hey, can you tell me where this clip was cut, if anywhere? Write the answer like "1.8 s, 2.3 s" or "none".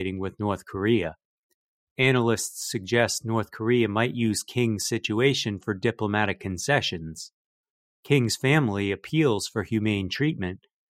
none

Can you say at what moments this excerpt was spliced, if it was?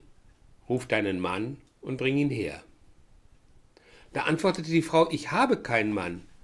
none

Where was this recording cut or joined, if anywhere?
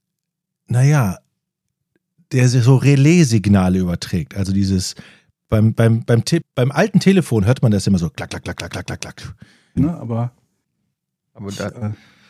6.4 s, 9.8 s

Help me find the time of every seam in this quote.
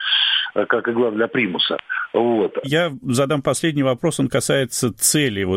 2.6 s

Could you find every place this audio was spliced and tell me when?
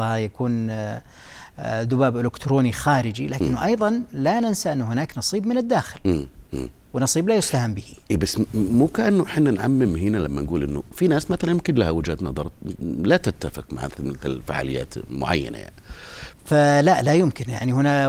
16.3 s

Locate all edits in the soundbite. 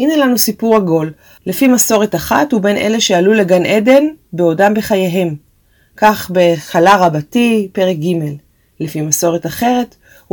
1.4 s

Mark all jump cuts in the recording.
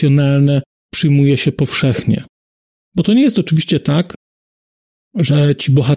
none

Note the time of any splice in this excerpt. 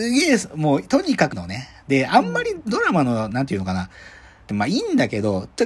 1.3 s, 4.5 s

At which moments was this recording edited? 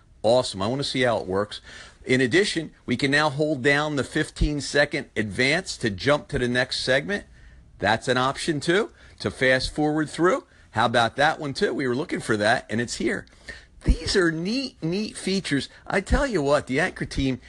none

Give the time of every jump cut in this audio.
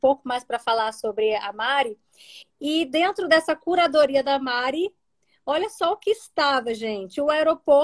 2.4 s

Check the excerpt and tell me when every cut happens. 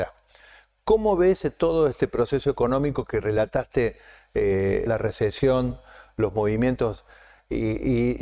4.9 s

